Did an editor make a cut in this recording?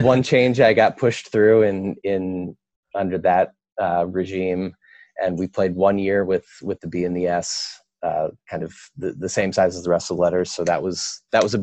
no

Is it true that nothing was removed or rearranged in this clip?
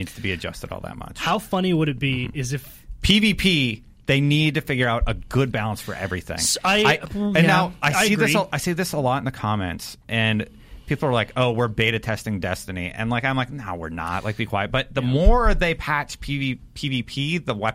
yes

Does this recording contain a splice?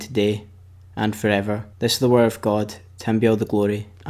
yes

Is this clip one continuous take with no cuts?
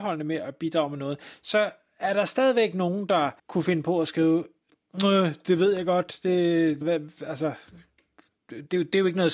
no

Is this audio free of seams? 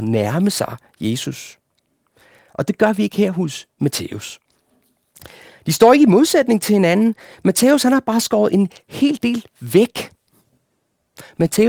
yes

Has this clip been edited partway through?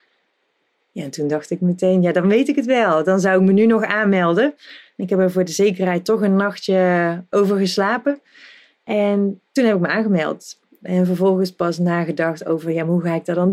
no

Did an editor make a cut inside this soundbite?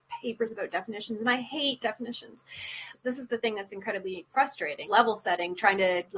yes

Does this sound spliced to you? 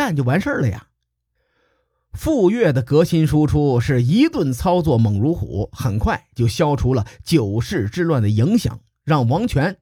no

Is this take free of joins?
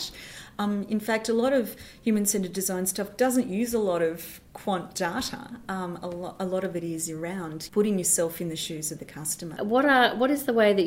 no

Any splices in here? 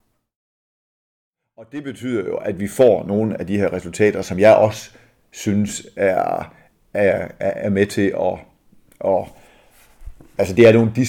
no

